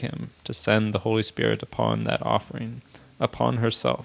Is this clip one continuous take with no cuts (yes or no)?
yes